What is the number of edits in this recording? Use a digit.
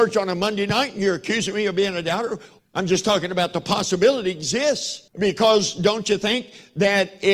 2